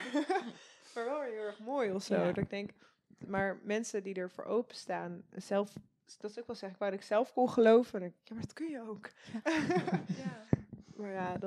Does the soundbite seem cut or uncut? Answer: uncut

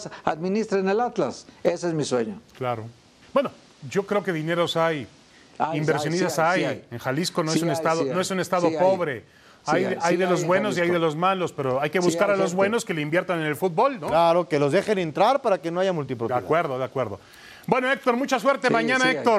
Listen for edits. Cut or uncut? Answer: cut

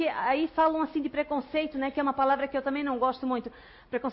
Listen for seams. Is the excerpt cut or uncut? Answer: uncut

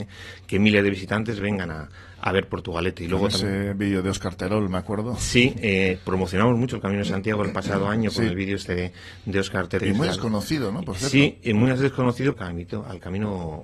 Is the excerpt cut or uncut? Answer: cut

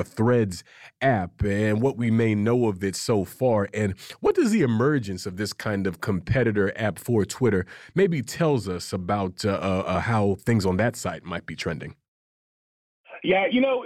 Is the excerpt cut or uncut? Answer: uncut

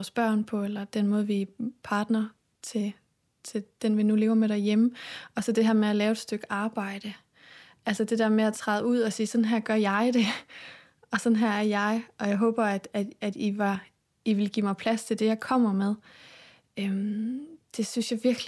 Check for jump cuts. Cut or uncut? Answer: uncut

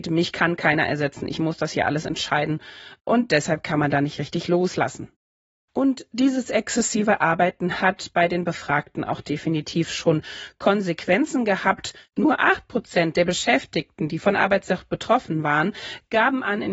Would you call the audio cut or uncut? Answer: uncut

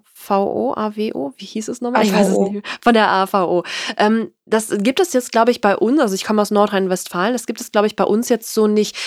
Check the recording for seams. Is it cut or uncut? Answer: uncut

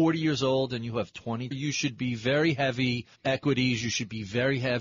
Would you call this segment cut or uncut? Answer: cut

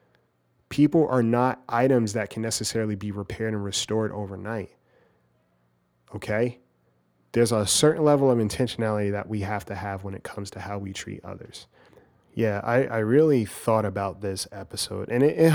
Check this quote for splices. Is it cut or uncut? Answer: uncut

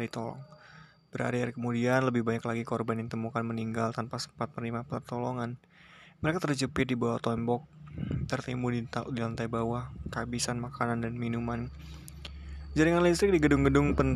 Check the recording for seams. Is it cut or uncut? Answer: uncut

